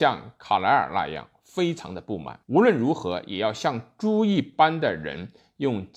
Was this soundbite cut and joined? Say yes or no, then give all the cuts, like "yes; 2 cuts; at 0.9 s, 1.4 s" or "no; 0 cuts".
yes; 1 cut; at 2.4 s